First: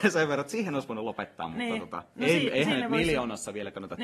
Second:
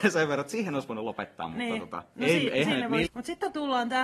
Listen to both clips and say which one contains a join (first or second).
second